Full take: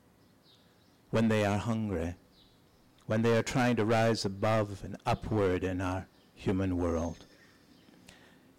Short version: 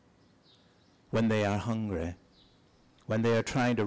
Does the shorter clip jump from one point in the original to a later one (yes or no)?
no